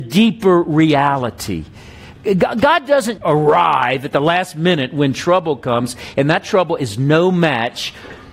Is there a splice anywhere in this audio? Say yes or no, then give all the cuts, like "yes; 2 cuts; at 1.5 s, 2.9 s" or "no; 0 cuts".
yes; 2 cuts; at 3.2 s, 6.1 s